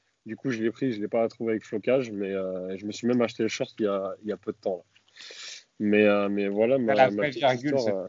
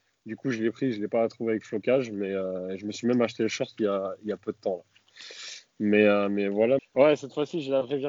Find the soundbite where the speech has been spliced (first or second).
second